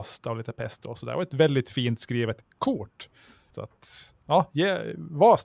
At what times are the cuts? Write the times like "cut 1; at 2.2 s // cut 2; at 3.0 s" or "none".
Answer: cut 1; at 3.5 s